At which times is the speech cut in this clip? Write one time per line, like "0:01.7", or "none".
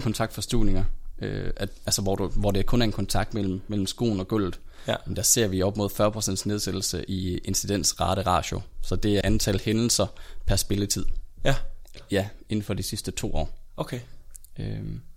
0:09.2
0:12.0